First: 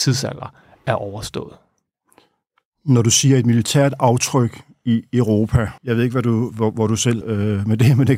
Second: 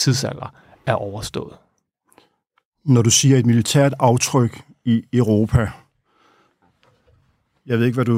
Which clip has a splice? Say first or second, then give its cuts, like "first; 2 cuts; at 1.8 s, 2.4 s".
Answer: first; 2 cuts; at 5.8 s, 7.2 s